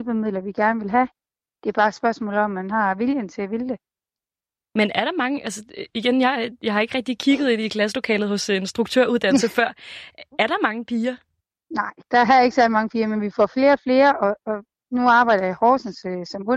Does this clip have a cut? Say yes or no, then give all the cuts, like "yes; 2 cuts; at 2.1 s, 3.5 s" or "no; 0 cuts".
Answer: no; 0 cuts